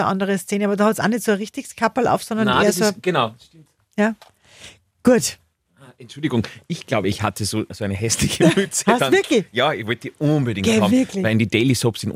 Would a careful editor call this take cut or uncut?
uncut